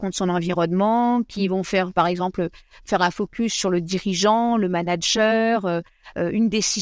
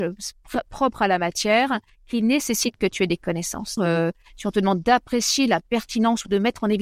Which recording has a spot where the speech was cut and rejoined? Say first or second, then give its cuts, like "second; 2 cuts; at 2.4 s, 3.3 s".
second; 1 cut; at 3.8 s